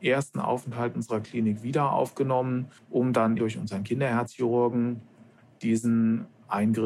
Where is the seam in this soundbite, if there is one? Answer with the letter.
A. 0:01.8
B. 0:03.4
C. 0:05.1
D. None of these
B